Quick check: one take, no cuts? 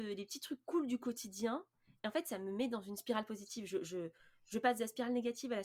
yes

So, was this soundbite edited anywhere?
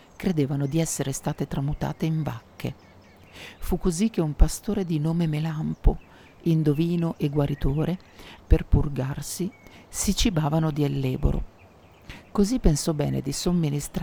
yes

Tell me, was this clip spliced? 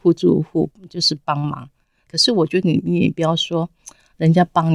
no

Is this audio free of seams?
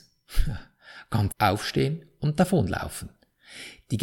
no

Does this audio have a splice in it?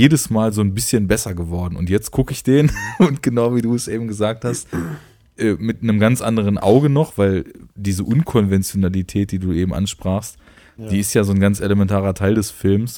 no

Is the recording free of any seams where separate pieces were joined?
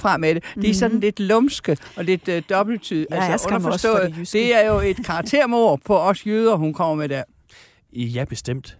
yes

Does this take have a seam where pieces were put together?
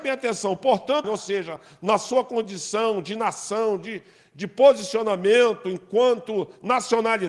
yes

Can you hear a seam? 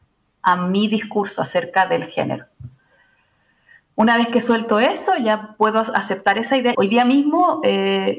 yes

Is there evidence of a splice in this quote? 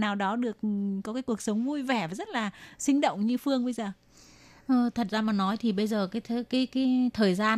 no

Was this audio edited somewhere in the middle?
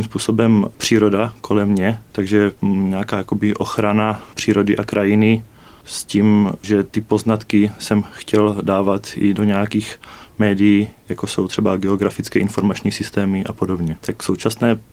yes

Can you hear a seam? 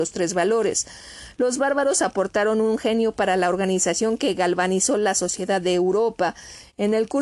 no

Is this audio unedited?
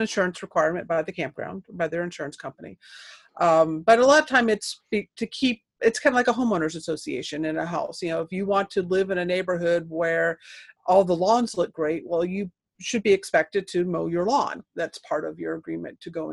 yes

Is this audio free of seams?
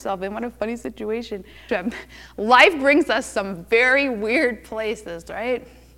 no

